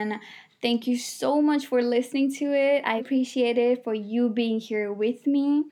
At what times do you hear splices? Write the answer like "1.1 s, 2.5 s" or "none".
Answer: 3.0 s